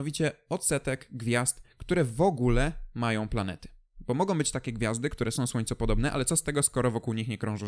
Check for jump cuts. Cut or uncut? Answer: uncut